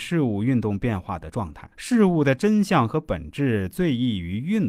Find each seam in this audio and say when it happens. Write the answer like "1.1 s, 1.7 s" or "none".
1.7 s